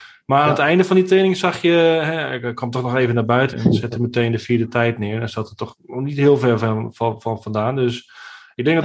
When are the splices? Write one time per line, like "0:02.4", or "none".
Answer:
0:03.5